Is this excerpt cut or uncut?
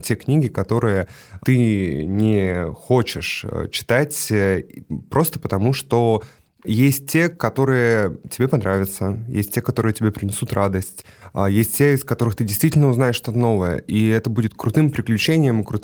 uncut